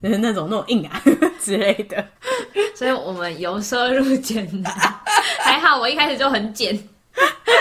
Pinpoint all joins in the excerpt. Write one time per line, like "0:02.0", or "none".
0:02.2